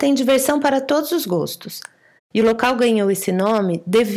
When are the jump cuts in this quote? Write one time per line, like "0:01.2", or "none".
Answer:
0:02.2